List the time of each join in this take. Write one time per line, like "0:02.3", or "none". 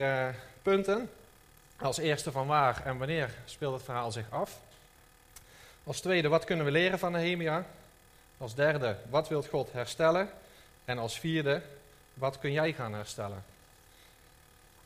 none